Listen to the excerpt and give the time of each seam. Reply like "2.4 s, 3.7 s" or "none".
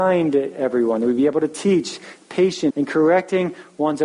2.7 s